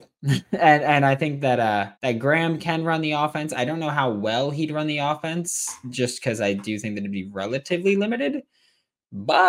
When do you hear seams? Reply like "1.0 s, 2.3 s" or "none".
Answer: 2.0 s

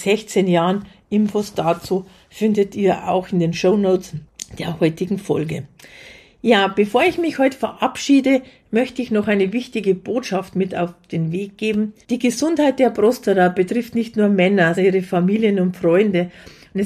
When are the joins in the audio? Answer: 12.0 s, 14.7 s

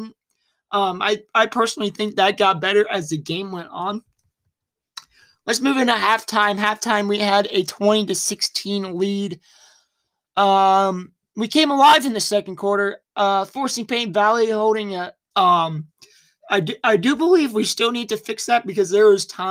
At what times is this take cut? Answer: 15.3 s

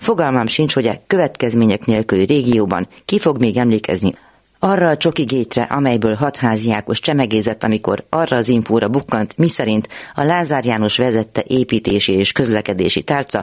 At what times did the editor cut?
none

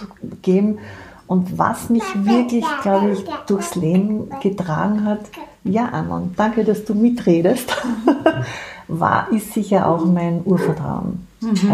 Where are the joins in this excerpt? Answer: none

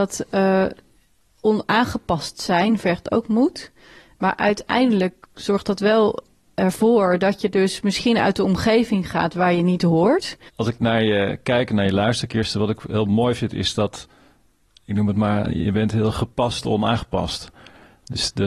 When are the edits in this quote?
10.5 s

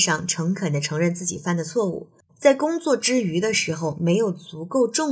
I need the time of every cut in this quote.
2.3 s

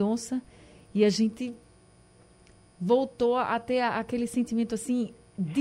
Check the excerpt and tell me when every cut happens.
none

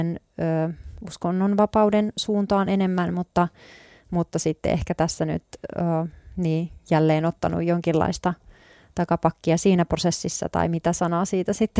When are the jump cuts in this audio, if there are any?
none

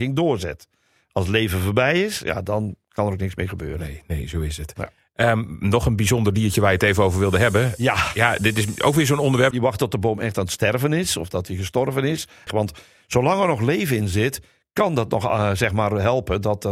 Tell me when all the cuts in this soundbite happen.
9.5 s, 12.5 s

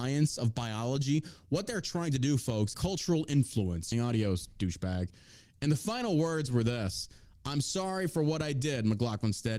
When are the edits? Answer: 2.7 s, 3.9 s

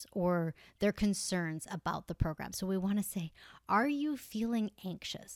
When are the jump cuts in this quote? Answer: none

